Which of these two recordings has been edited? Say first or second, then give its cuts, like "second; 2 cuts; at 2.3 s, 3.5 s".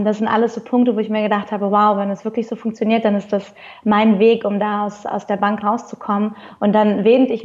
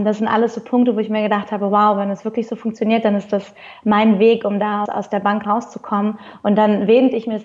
second; 1 cut; at 4.8 s